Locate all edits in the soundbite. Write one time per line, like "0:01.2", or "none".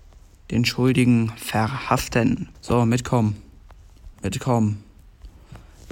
0:02.5
0:04.1